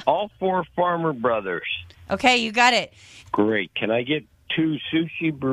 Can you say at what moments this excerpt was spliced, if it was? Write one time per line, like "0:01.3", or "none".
0:03.2